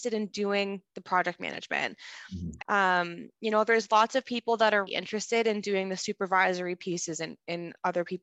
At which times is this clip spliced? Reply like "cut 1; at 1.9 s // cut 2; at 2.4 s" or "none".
cut 1; at 2.6 s // cut 2; at 4.9 s